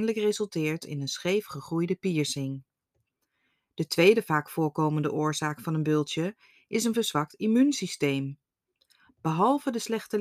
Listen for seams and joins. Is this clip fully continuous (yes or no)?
yes